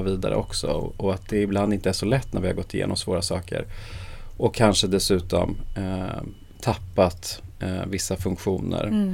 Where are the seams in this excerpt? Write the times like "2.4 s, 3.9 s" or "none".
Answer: none